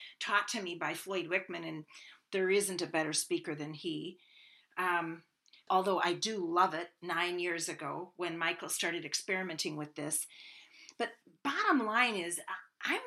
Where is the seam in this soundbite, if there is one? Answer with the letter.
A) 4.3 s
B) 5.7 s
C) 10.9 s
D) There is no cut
B